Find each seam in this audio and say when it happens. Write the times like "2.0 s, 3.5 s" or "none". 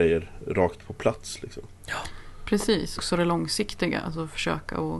3.0 s